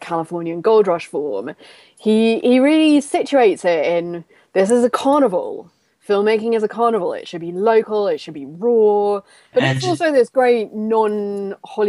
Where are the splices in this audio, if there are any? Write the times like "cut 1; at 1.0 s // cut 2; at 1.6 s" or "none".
cut 1; at 9.5 s